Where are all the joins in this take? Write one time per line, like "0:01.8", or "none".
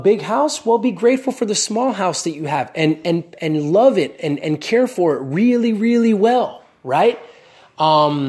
none